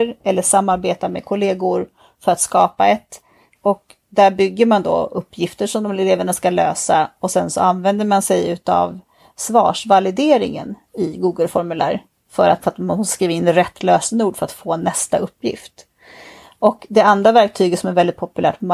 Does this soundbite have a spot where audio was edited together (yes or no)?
yes